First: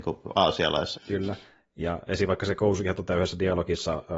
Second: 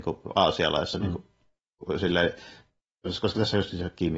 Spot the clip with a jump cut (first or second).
first